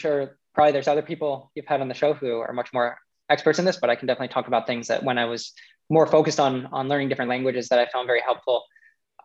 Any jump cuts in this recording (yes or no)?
no